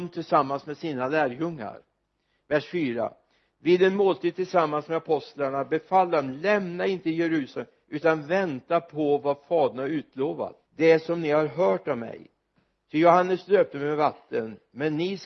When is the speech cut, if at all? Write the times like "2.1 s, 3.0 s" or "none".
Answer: 10.7 s